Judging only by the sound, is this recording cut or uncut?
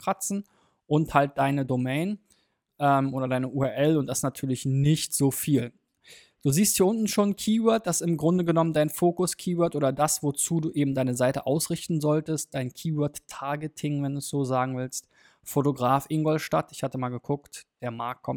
uncut